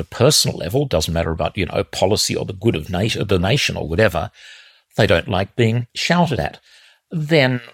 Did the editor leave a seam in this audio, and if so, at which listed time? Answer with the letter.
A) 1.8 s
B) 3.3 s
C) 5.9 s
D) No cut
C